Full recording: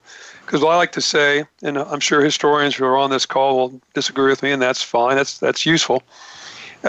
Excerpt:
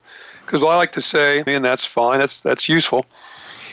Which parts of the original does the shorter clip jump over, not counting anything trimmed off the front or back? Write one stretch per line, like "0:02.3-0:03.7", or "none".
0:01.5-0:04.4